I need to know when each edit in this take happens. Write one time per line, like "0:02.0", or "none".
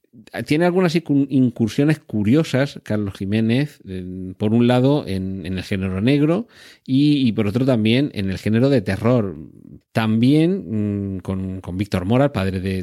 0:09.8